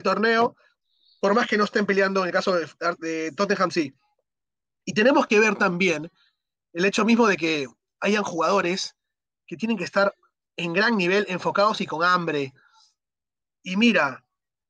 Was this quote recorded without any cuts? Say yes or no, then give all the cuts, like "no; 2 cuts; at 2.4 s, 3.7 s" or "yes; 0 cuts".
yes; 0 cuts